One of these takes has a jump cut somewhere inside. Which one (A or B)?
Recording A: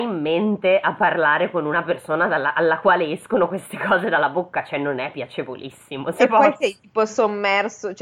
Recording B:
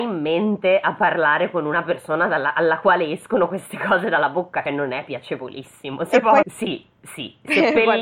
B